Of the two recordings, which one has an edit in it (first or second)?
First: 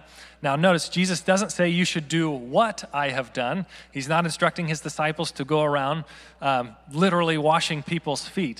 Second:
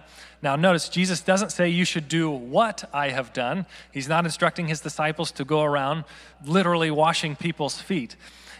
second